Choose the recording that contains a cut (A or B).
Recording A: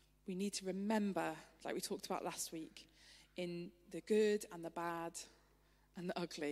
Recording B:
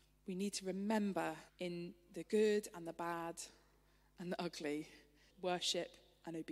B